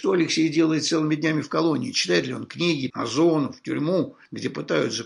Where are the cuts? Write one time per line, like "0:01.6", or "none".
0:02.9